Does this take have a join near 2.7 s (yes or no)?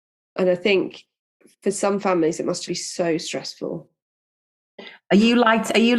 yes